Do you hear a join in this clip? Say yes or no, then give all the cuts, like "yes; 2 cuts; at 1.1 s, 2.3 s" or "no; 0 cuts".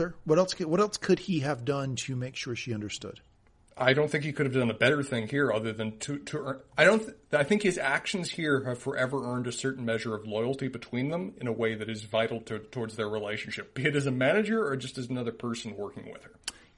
no; 0 cuts